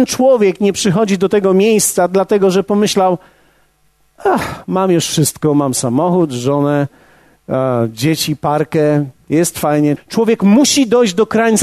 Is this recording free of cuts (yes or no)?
no